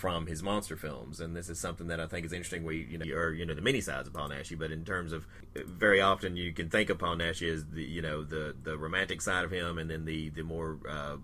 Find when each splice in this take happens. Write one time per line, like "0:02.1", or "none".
0:03.0